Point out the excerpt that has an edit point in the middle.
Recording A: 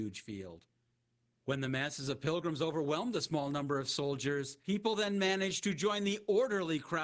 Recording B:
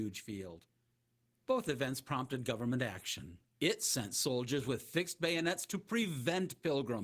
B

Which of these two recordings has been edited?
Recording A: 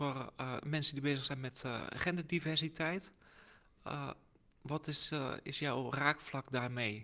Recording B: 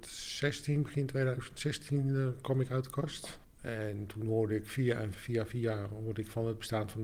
B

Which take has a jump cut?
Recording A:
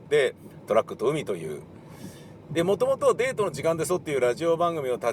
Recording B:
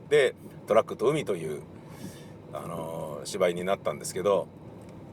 A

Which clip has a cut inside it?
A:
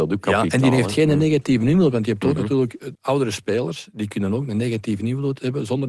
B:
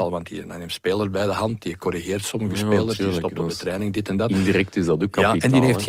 A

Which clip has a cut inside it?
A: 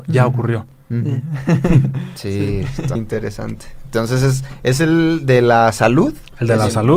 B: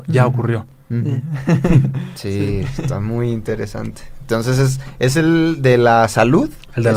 A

